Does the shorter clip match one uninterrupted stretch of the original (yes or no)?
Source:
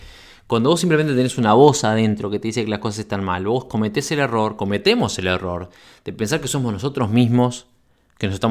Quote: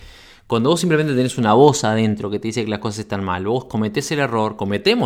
yes